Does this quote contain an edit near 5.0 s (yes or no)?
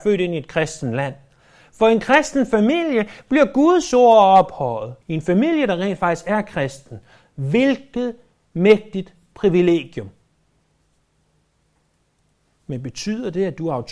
yes